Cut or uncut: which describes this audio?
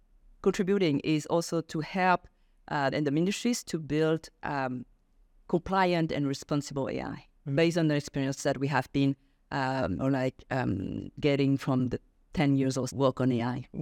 cut